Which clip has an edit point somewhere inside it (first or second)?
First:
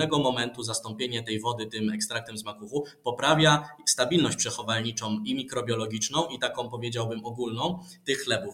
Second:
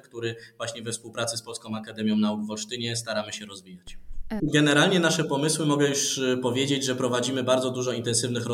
second